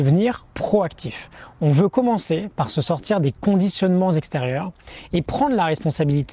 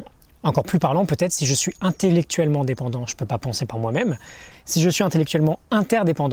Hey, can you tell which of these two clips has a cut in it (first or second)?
second